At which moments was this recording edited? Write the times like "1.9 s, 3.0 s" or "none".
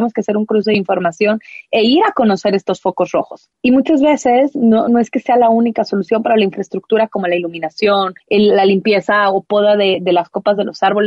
4.9 s